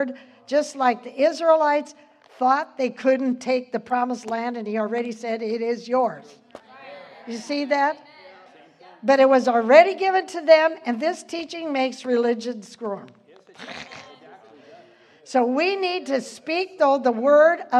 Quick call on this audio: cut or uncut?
uncut